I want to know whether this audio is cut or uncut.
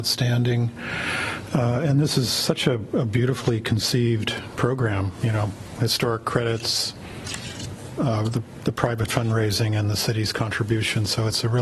uncut